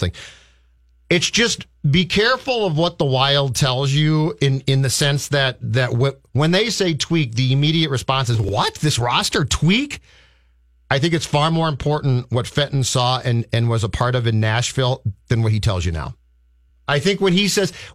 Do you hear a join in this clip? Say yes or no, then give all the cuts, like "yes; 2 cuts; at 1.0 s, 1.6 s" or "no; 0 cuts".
no; 0 cuts